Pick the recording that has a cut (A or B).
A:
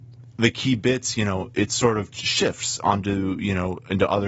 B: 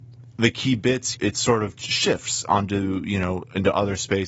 B